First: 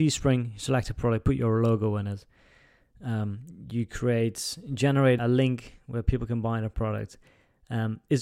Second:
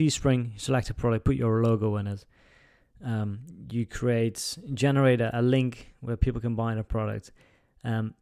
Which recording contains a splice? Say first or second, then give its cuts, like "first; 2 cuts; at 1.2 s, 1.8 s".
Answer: first; 1 cut; at 5.2 s